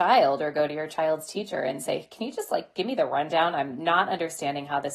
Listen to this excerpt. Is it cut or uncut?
uncut